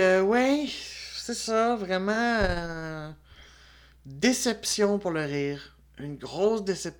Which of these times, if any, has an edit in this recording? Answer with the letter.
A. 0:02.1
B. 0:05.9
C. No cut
C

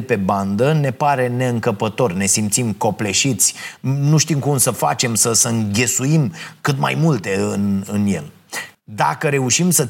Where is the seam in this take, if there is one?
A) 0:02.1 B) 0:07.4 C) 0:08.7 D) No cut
C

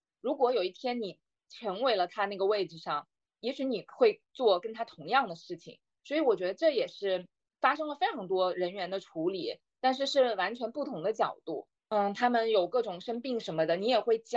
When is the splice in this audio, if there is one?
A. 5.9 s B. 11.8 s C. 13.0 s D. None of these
B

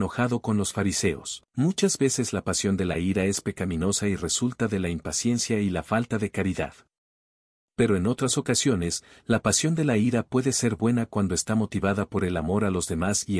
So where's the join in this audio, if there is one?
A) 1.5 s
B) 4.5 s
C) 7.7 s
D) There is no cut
A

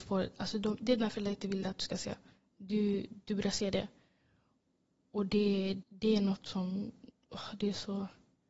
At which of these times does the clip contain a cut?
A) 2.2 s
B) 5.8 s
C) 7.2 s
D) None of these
B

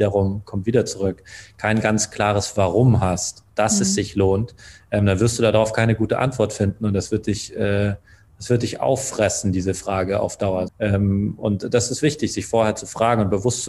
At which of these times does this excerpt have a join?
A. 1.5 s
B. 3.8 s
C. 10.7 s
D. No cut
C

